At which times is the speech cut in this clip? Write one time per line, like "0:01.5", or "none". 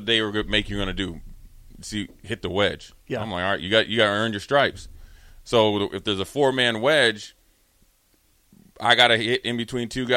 none